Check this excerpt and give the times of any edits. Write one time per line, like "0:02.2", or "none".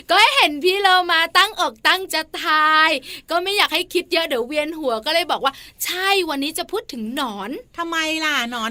0:02.1